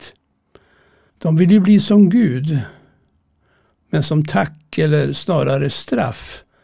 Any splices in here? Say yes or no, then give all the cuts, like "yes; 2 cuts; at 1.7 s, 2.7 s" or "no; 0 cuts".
yes; 1 cut; at 1.1 s